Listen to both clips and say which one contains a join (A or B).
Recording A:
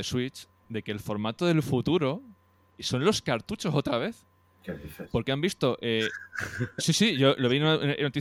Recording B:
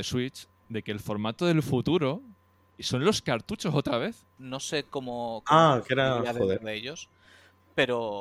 B